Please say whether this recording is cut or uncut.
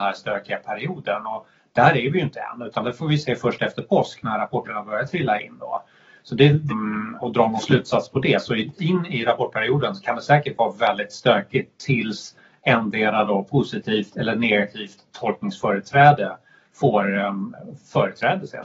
cut